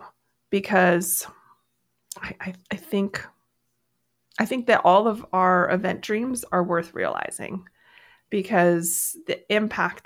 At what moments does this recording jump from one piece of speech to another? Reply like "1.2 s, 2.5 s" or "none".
2.6 s

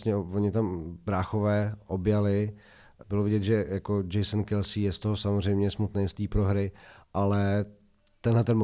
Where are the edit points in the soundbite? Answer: 3.0 s

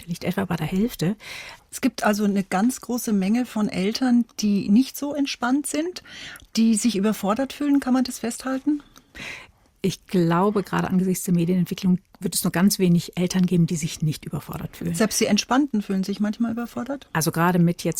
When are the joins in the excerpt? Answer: 1.6 s

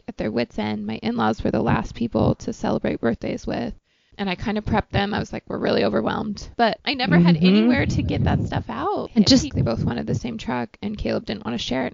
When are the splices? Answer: 6.5 s, 9.5 s

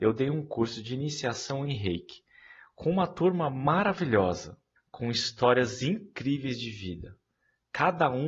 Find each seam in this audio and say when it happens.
4.7 s

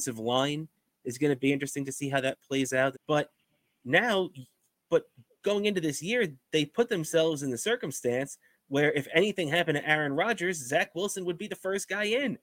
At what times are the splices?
2.9 s

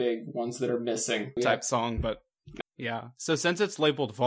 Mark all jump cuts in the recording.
1.4 s, 2.6 s

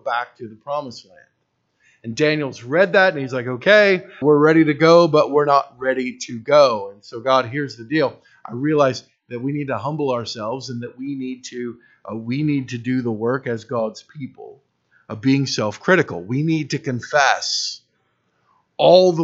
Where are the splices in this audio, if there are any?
4.2 s

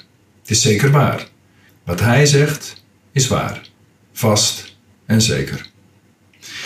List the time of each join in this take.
1.7 s

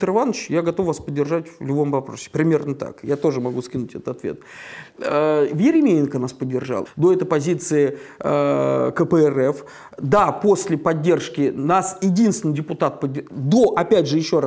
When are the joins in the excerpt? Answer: 6.9 s

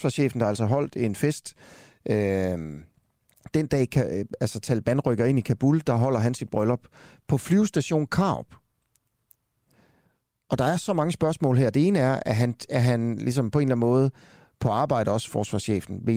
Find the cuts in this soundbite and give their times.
none

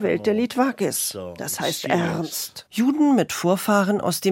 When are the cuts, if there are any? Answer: 2.7 s

